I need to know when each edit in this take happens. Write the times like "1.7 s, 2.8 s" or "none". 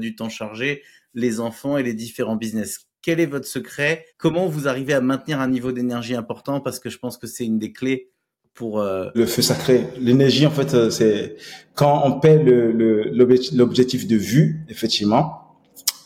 4.1 s, 9.1 s